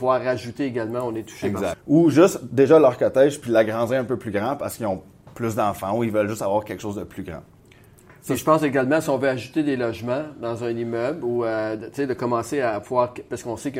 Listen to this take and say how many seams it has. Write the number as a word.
one